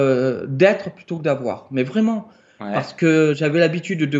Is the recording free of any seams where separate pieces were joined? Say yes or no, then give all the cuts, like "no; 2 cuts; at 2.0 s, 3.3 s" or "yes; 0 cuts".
yes; 0 cuts